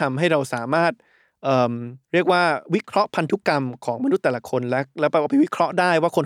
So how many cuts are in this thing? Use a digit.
1